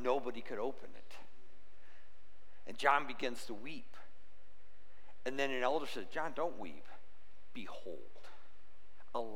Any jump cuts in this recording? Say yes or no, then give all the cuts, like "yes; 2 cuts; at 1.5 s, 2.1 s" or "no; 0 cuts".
no; 0 cuts